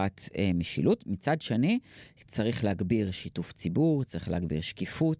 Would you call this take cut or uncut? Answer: uncut